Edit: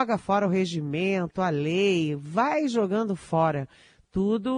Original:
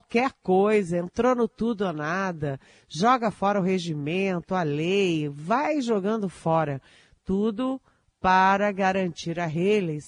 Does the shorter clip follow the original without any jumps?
yes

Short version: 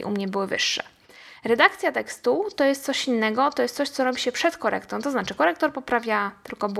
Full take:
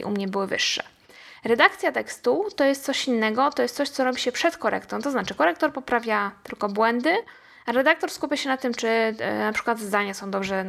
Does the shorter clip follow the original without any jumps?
yes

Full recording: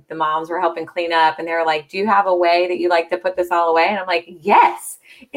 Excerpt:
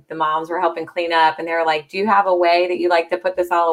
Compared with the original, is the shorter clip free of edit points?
yes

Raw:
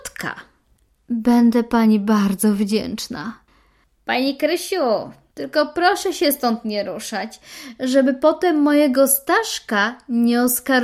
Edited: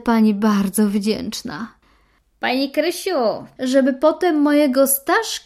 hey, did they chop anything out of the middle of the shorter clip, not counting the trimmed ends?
yes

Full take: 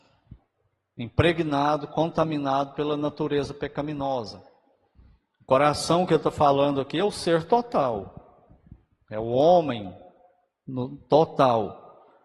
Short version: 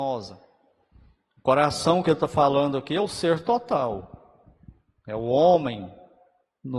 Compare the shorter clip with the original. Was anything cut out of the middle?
no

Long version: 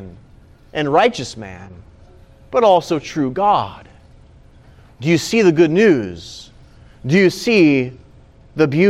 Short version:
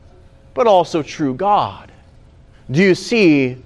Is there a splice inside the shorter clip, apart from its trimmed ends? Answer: yes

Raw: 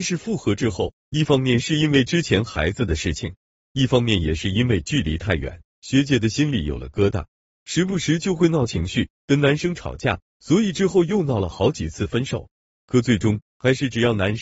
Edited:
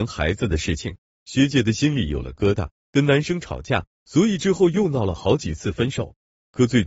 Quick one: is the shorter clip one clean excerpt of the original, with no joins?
no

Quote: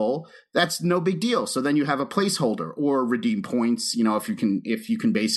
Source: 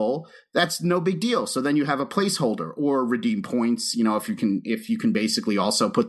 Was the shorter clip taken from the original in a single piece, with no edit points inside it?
yes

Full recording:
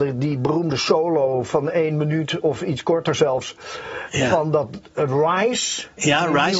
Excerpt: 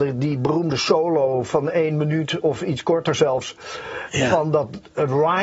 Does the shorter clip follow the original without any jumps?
yes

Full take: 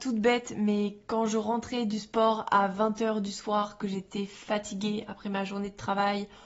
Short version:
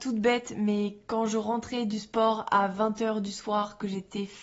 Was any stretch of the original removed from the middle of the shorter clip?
no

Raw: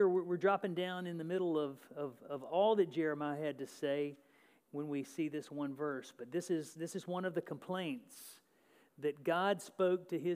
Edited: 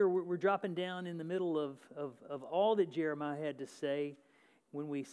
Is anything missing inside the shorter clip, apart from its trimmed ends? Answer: no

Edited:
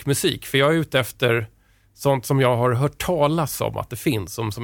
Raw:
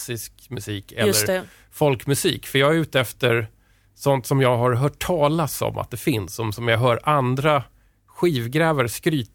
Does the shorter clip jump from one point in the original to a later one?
no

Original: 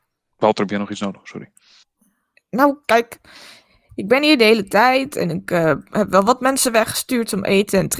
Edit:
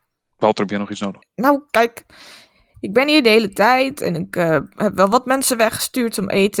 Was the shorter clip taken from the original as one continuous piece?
no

